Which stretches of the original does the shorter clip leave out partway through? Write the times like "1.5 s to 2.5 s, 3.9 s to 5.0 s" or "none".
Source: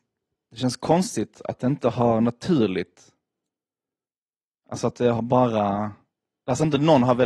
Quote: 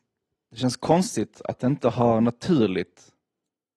none